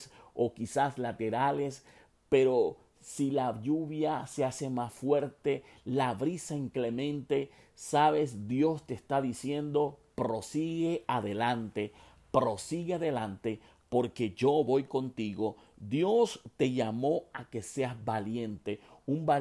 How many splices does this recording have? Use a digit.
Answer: 0